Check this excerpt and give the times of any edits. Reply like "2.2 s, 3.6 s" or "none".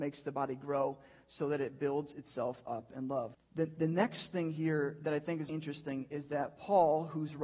3.3 s, 5.5 s

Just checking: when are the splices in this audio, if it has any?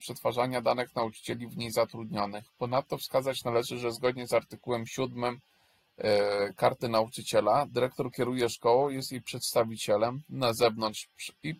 none

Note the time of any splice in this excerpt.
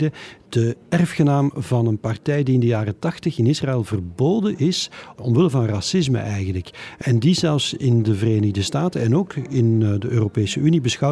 none

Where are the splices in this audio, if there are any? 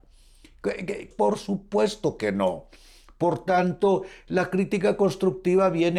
1.1 s

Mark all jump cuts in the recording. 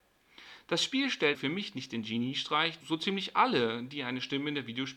1.3 s, 2.8 s

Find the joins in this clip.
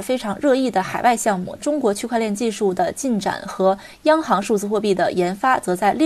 1.6 s

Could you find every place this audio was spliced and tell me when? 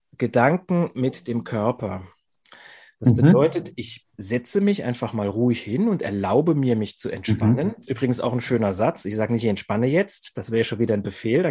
none

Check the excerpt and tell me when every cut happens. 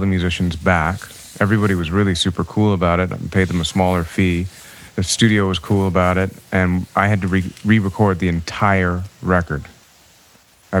4.9 s

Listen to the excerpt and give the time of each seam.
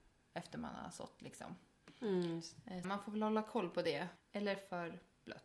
2.8 s, 4.2 s

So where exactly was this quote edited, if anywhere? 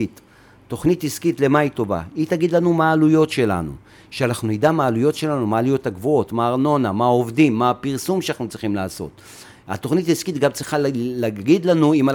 6.3 s

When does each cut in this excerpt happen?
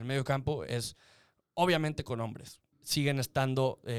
2.7 s

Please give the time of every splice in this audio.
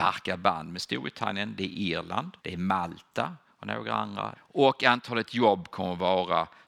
2.4 s, 4.3 s

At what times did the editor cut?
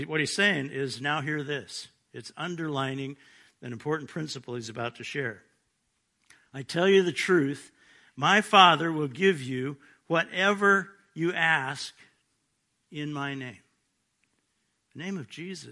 none

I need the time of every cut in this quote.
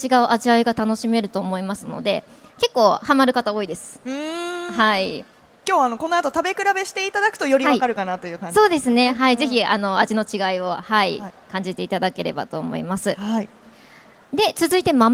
none

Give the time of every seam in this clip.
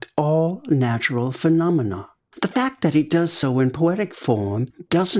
none

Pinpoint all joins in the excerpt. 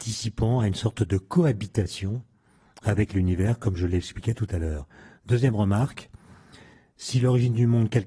none

